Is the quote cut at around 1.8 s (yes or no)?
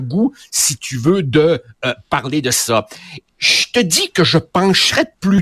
no